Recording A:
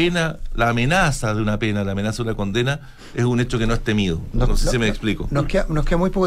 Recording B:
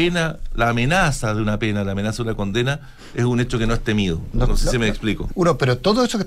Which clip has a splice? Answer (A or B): B